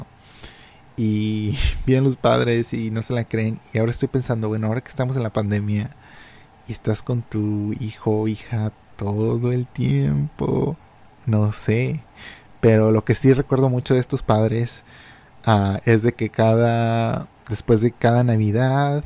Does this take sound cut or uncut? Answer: uncut